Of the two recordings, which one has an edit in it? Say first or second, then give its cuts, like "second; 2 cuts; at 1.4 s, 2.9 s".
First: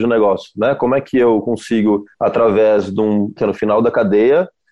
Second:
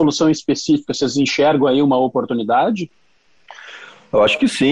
first; 2 cuts; at 2.1 s, 3.4 s